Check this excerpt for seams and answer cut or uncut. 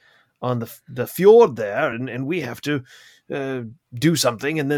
uncut